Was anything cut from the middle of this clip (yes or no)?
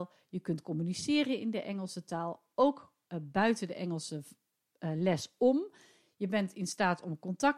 no